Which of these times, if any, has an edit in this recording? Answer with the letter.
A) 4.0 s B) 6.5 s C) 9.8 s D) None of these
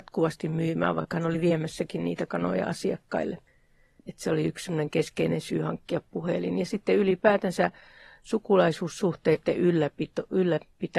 A